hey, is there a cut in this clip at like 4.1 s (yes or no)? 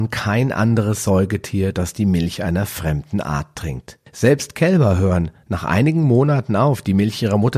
yes